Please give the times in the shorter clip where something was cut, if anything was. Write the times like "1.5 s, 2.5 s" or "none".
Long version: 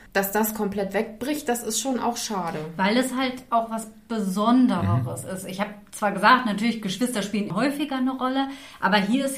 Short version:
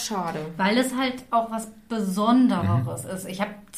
none